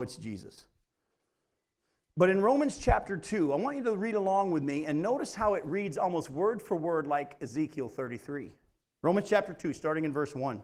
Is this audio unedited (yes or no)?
yes